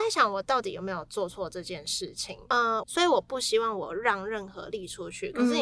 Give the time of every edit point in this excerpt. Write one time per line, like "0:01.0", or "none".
0:02.8